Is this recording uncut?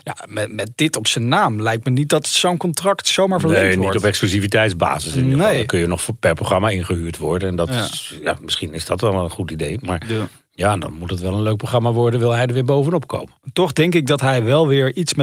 yes; 0 cuts

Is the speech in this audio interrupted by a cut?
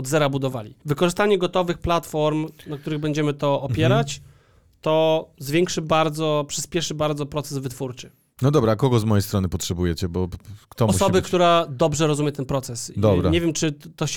no; 0 cuts

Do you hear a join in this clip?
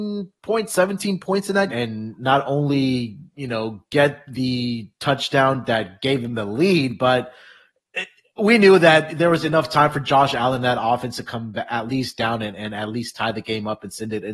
yes; 1 cut; at 1.7 s

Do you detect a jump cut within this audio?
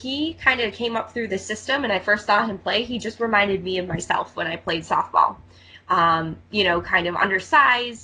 no; 0 cuts

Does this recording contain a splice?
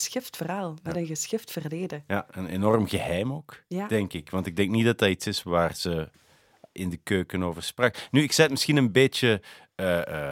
no; 0 cuts

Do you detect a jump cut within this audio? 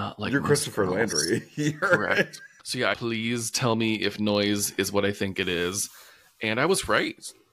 yes; 1 cut; at 2.9 s

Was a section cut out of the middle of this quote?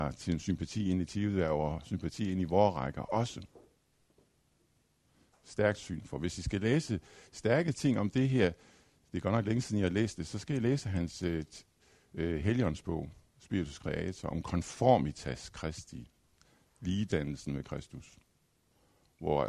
no; 0 cuts

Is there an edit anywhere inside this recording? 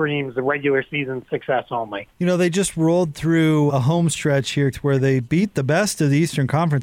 yes; 3 cuts; at 2.1 s, 3.7 s, 4.7 s

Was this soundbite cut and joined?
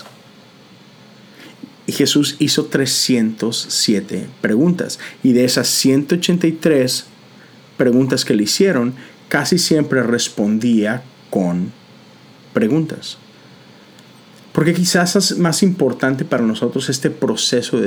no; 0 cuts

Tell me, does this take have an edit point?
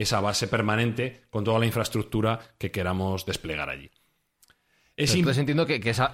no; 0 cuts

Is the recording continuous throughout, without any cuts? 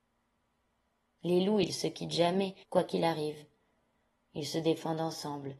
no; 2 cuts; at 1.1 s, 2.6 s

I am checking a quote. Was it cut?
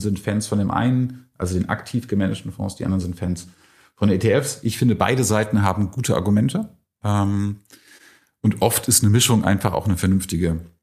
no; 0 cuts

